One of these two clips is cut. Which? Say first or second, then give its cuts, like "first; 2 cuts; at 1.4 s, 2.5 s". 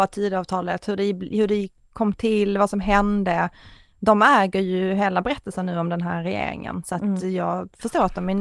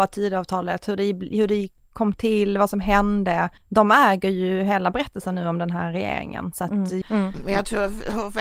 second; 2 cuts; at 3.6 s, 7.0 s